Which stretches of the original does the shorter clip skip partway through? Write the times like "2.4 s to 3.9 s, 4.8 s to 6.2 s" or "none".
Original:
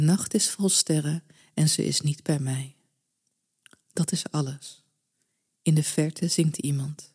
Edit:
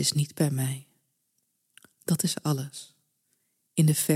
none

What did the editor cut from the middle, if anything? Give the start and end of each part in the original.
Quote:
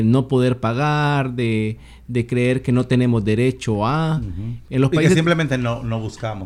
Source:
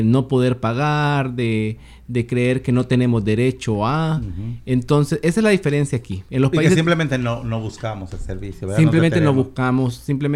4.6 s to 6.2 s

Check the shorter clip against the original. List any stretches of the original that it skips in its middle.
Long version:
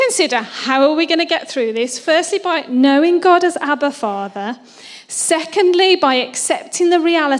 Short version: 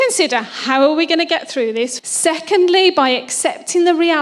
2.0 s to 5.0 s

